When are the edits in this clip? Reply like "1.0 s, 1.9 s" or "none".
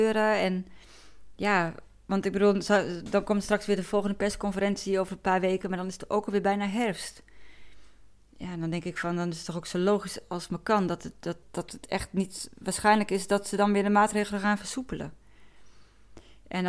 11.4 s